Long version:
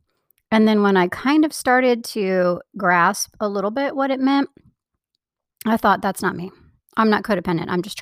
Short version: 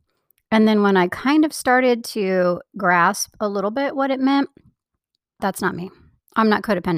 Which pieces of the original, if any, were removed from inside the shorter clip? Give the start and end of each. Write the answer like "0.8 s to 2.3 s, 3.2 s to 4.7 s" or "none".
5.4 s to 6.0 s